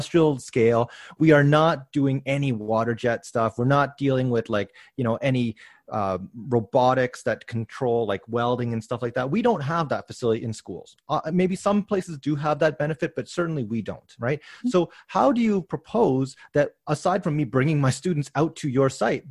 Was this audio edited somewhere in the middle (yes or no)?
no